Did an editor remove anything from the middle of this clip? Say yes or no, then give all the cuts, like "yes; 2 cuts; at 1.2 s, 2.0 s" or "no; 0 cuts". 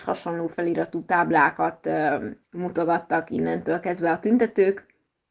yes; 1 cut; at 2.4 s